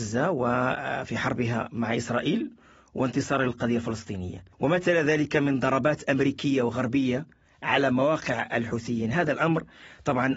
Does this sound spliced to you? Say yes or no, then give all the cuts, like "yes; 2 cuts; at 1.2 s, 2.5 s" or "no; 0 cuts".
yes; 1 cut; at 4.5 s